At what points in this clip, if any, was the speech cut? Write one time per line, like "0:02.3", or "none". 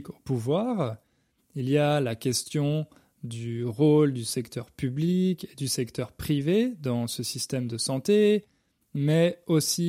none